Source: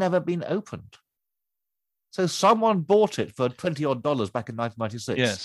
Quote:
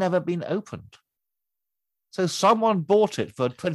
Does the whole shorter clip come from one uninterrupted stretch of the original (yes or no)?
yes